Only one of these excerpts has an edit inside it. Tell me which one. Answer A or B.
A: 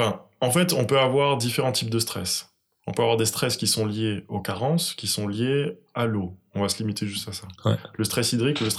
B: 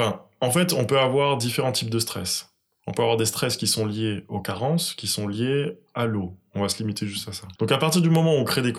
B